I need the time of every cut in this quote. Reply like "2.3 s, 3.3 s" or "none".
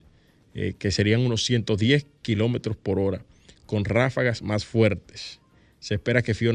none